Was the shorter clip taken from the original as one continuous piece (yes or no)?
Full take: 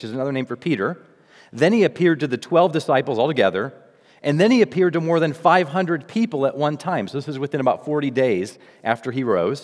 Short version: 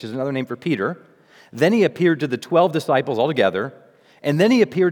yes